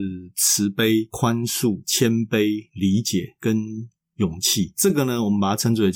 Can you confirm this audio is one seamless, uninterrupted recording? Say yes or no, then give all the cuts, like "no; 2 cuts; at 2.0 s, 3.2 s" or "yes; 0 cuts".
yes; 0 cuts